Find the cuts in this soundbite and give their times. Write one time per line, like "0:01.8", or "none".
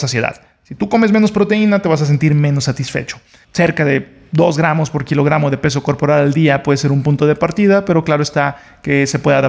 0:03.4